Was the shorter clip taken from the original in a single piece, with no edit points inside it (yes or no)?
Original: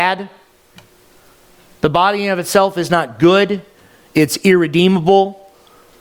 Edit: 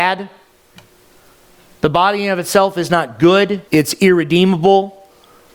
no